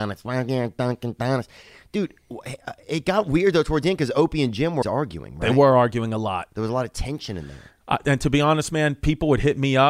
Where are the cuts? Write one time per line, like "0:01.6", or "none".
0:04.8